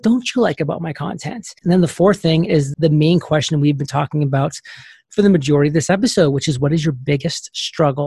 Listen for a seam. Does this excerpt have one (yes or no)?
yes